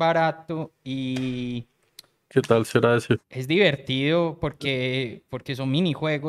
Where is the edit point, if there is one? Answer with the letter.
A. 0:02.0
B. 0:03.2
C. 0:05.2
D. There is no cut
B